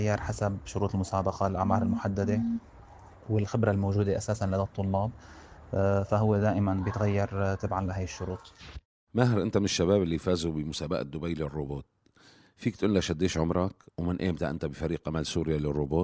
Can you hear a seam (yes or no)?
yes